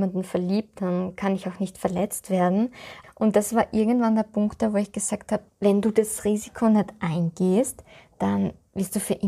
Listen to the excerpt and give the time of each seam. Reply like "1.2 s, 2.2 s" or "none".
3.0 s, 5.5 s